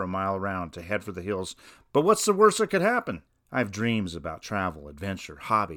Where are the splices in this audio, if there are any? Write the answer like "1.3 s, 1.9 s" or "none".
none